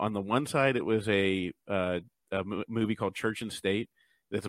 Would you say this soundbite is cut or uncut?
uncut